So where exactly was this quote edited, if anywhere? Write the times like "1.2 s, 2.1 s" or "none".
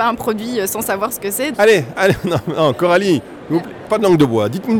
1.5 s

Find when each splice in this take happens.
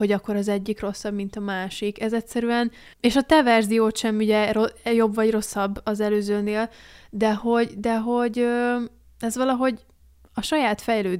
2.9 s

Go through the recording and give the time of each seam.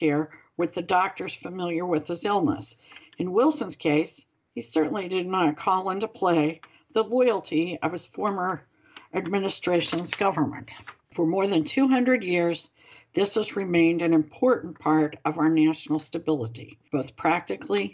3.0 s, 11.0 s

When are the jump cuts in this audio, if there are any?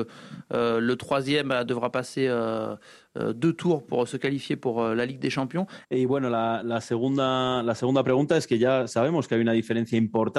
5.8 s

